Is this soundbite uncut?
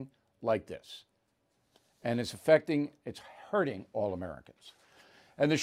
yes; 0 cuts

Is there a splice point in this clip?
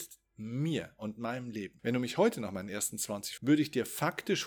yes; 2 cuts; at 1.8 s, 3.4 s

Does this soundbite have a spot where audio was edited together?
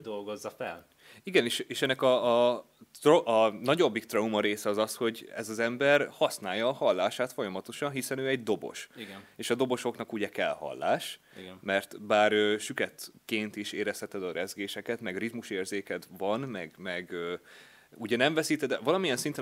no; 0 cuts

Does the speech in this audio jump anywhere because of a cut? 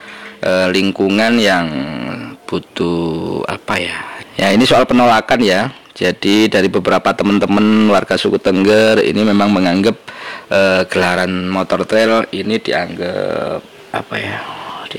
yes; 1 cut; at 4.2 s

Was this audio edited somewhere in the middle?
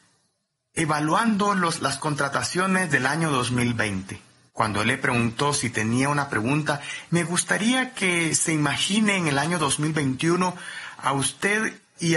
yes; 2 cuts; at 4.5 s, 7.1 s

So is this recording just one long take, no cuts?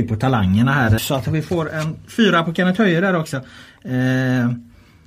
no; 1 cut; at 1.0 s

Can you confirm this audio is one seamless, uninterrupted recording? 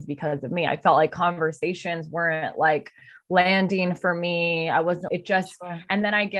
no; 1 cut; at 5.1 s

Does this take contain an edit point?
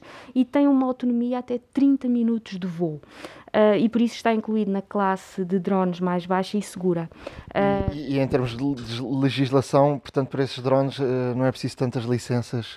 no; 0 cuts

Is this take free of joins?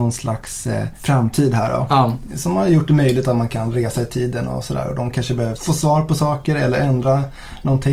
yes; 0 cuts

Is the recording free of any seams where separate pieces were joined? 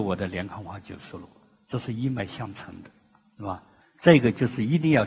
no; 1 cut; at 3.8 s

